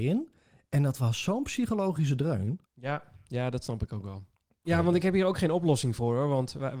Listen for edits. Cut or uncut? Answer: cut